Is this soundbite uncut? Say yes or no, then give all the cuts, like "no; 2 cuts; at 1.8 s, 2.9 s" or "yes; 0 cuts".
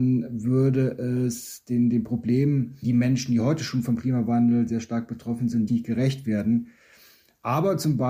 no; 2 cuts; at 2.8 s, 5.7 s